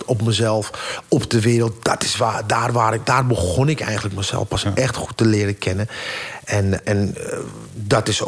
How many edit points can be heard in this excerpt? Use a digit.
1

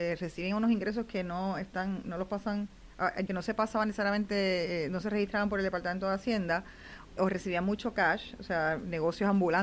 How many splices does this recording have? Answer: 2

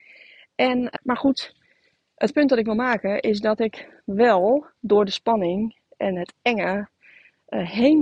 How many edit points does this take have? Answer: 1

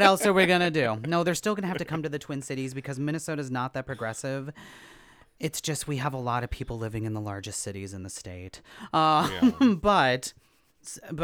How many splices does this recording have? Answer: 0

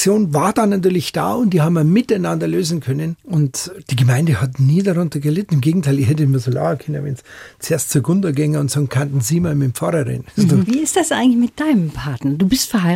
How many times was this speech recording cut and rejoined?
1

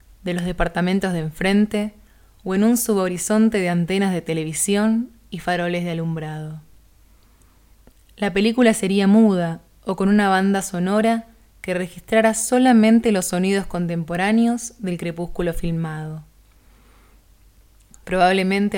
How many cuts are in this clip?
0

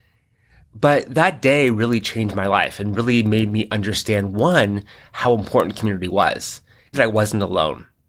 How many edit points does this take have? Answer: 1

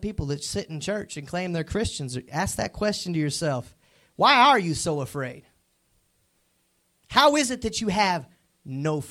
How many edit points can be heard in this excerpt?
0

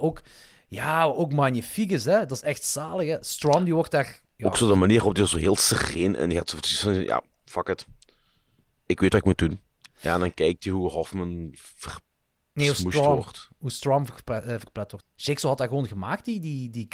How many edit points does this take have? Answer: 2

